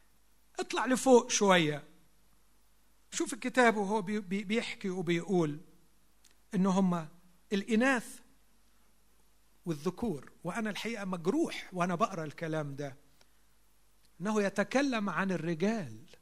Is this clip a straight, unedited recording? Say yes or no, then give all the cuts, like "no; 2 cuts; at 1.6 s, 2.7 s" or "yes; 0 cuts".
yes; 0 cuts